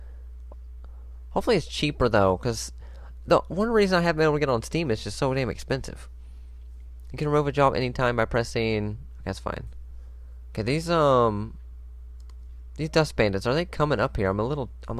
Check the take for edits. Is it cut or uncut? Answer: uncut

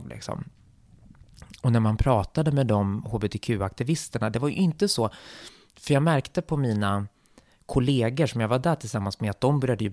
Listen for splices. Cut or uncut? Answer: uncut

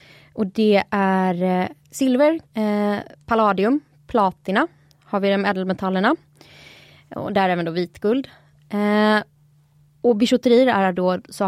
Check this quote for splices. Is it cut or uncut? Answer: cut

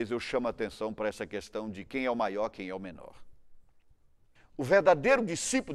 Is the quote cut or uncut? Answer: cut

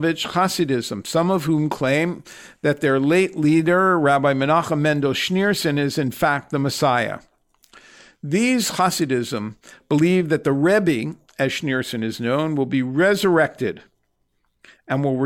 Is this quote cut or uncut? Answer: uncut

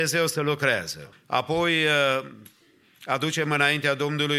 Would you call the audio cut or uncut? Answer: cut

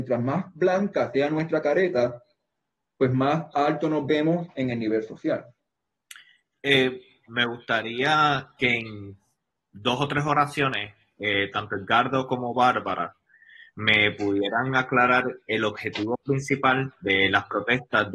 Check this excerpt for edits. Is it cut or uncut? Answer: uncut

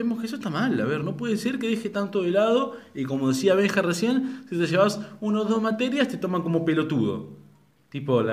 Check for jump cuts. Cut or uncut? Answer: uncut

